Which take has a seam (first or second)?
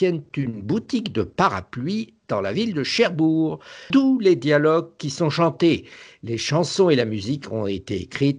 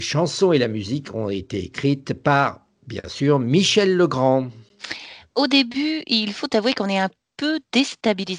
first